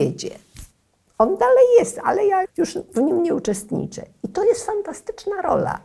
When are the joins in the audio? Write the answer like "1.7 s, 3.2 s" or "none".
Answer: 2.4 s